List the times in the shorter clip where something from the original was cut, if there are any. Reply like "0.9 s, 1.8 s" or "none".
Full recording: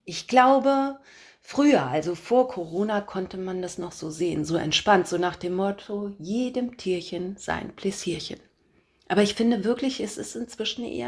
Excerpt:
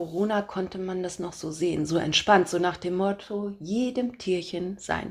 none